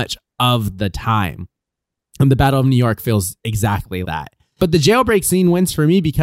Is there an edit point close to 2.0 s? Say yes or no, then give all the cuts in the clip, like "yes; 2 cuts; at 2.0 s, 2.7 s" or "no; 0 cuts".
no; 1 cut; at 4.0 s